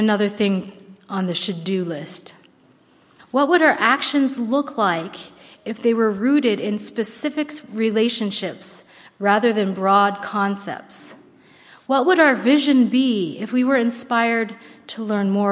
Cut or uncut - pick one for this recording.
cut